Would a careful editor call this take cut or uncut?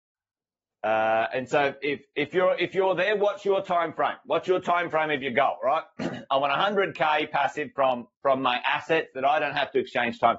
uncut